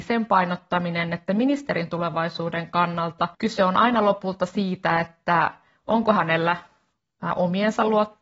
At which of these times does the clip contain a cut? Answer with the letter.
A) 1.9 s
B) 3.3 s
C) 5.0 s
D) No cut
B